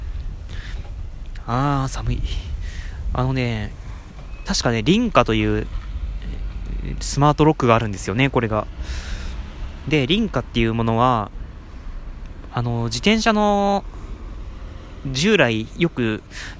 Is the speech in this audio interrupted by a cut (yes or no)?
no